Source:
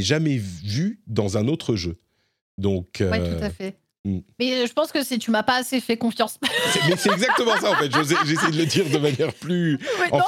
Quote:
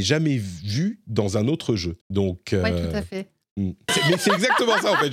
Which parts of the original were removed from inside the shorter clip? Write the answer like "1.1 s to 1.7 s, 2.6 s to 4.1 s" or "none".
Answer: 2.0 s to 2.5 s, 4.4 s to 6.7 s

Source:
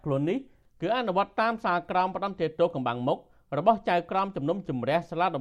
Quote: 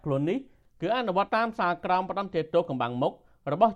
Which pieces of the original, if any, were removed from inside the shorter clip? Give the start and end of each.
1.3 s to 1.3 s

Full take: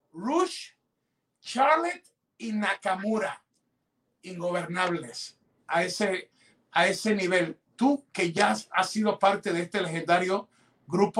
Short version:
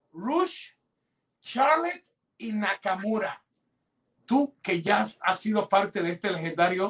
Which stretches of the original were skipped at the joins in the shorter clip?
4.2 s to 7.7 s

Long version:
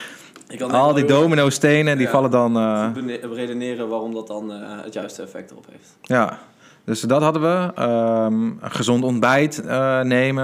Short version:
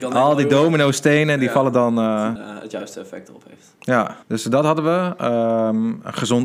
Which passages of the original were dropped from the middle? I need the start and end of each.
2.9 s to 4.6 s, 6.4 s to 6.8 s

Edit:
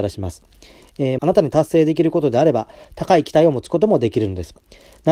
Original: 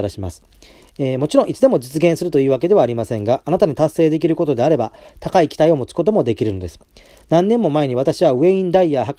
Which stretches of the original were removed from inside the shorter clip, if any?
1.2 s to 3.4 s

